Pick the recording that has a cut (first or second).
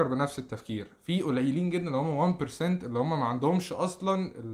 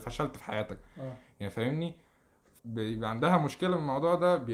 second